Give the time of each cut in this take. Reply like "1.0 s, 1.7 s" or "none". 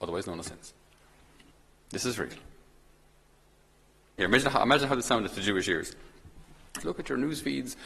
4.2 s, 6.8 s

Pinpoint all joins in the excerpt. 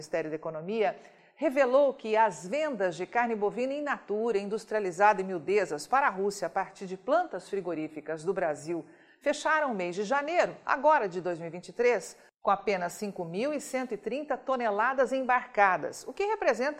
none

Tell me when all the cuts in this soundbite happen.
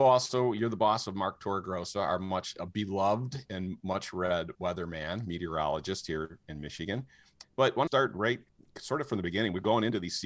7.4 s

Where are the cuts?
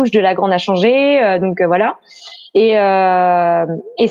none

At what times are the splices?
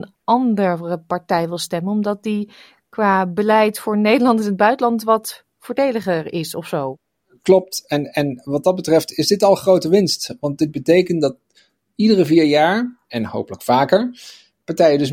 none

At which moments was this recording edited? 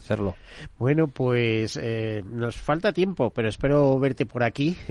none

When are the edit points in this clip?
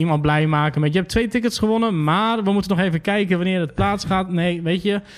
none

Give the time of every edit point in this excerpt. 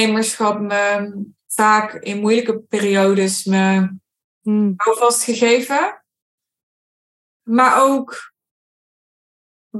none

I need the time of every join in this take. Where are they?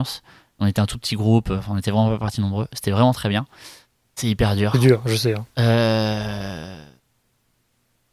4.1 s

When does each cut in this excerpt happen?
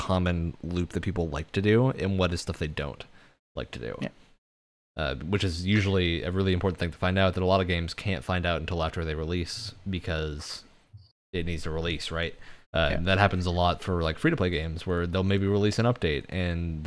12.6 s

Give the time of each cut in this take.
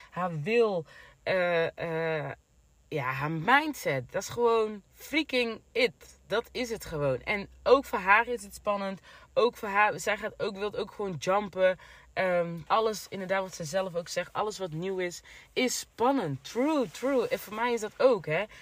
4.9 s, 12.7 s

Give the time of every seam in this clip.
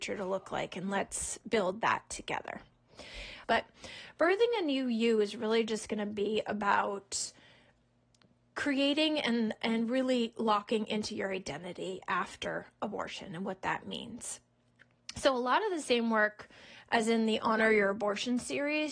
3.4 s

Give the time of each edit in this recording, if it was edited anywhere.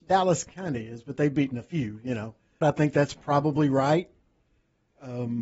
2.6 s

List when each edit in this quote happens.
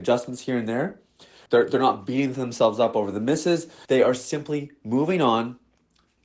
1.5 s, 3.9 s

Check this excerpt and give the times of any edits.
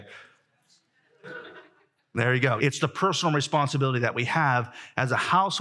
2.6 s

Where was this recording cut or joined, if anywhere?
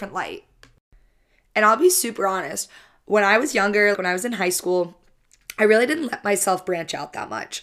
3.9 s

